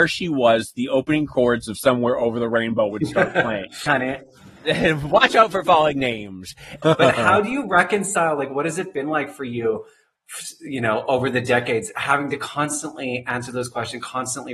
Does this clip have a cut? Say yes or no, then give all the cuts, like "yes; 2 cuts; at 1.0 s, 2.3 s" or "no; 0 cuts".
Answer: yes; 2 cuts; at 3.9 s, 6.8 s